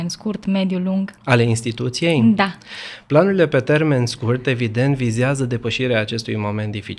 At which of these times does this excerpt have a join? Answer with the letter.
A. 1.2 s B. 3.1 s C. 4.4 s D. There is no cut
A